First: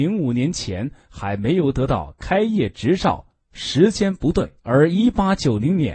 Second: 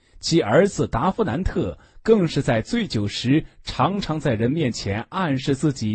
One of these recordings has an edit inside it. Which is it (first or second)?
first